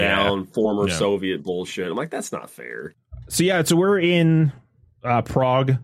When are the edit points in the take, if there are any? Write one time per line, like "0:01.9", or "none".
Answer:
none